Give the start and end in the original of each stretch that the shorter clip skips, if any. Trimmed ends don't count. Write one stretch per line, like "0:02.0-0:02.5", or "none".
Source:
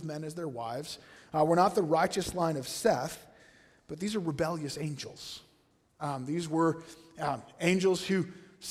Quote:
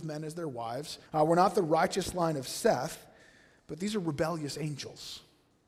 0:01.1-0:01.3